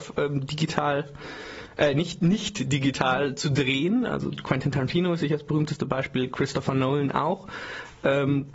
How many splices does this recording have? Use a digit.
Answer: 0